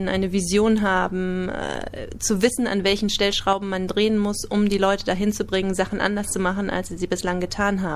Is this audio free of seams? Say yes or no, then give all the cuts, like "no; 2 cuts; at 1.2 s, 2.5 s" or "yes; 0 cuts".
yes; 0 cuts